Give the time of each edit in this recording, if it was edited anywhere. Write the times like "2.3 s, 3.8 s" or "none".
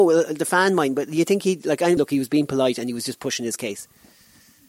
2.0 s